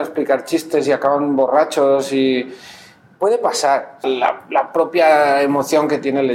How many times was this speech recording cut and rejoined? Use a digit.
1